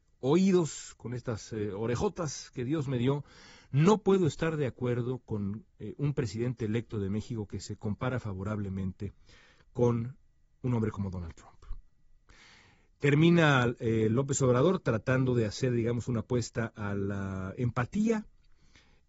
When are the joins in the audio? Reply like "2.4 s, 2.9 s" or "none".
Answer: none